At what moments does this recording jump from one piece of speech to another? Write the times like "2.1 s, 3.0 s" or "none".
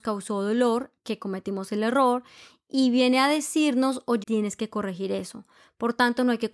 4.2 s